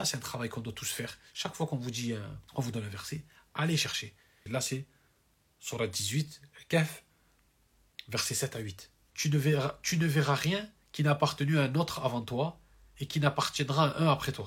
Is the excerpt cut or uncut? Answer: cut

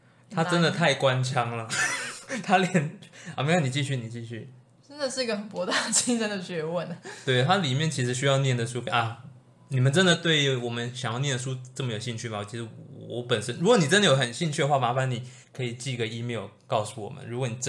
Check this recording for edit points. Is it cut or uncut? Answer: cut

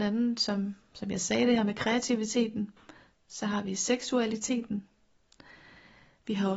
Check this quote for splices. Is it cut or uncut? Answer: uncut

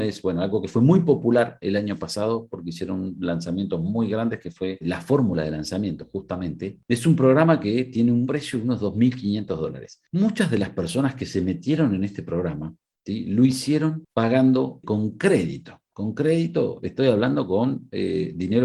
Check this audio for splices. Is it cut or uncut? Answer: uncut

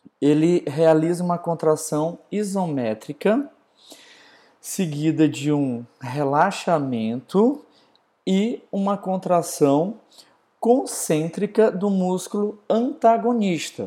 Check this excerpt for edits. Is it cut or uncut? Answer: uncut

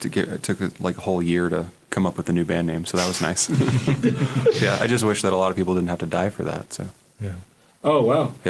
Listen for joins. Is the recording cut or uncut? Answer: uncut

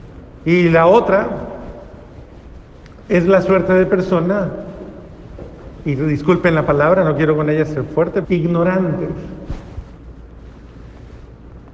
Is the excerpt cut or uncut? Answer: cut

